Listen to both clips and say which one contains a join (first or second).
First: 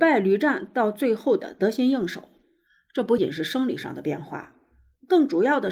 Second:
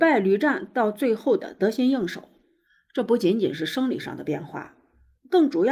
first